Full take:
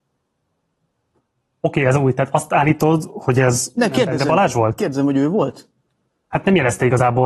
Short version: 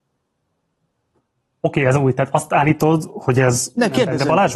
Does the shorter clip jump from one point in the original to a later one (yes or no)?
no